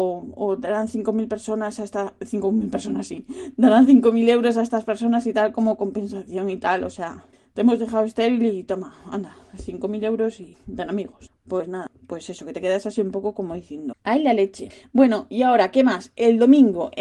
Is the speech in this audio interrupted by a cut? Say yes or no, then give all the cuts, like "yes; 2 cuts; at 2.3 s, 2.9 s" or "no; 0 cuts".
yes; 1 cut; at 13.9 s